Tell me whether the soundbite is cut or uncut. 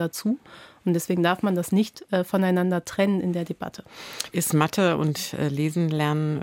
cut